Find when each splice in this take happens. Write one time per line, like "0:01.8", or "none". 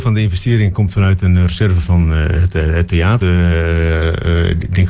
0:01.8
0:03.2